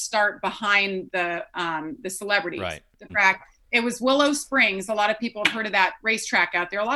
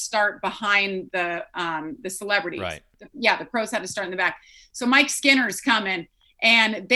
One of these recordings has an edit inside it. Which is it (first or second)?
first